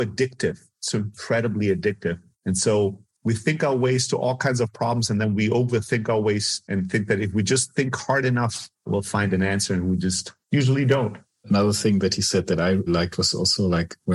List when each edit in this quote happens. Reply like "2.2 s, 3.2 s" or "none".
10.4 s, 12.9 s

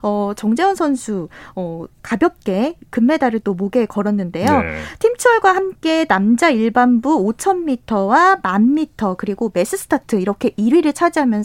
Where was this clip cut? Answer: none

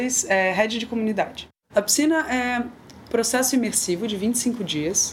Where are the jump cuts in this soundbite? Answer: 1.6 s, 3.1 s

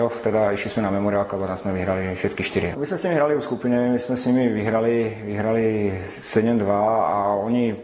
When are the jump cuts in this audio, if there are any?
2.7 s

